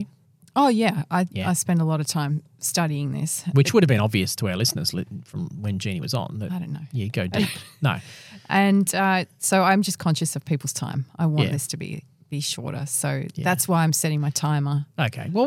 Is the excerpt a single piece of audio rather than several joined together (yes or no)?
yes